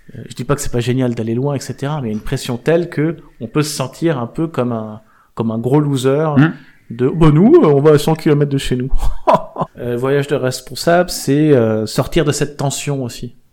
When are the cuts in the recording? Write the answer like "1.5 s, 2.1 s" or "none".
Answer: 9.7 s